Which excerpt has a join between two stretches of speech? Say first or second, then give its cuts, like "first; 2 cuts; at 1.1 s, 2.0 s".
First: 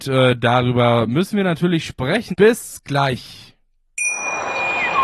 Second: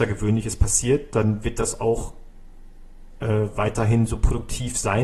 first; 1 cut; at 2.3 s